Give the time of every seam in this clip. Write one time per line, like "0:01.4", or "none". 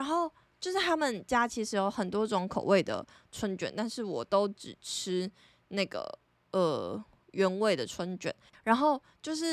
0:08.5